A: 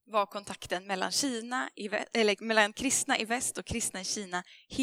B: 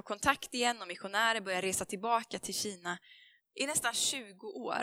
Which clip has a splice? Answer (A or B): B